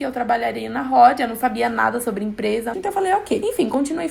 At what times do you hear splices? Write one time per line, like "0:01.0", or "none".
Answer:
0:02.7